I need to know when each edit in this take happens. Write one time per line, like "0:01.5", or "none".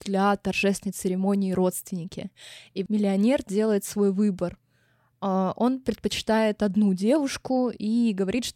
0:02.9